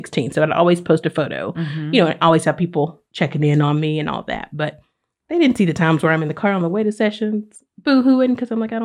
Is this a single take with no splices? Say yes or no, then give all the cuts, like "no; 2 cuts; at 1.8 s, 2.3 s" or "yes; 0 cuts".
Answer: yes; 0 cuts